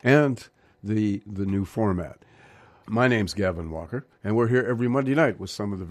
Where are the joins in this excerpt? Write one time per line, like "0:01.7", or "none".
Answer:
0:02.8
0:04.1